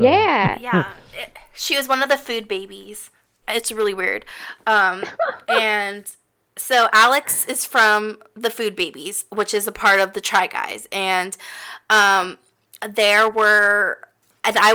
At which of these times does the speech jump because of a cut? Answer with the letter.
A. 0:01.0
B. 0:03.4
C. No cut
B